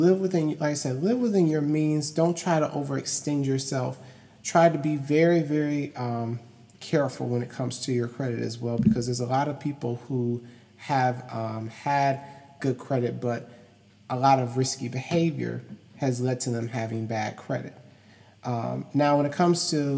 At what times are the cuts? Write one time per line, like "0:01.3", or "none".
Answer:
none